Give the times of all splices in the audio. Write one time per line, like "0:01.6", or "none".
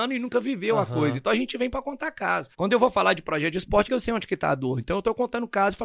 0:02.5
0:03.9